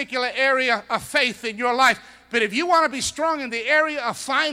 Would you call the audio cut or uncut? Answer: uncut